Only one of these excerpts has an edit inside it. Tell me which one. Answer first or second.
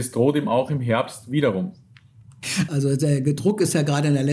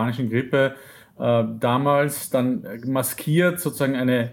first